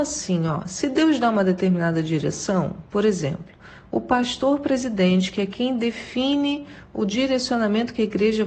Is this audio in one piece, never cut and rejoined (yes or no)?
yes